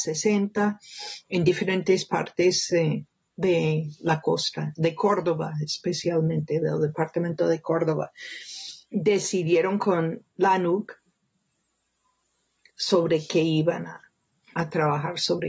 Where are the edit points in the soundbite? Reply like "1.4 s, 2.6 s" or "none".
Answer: 8.8 s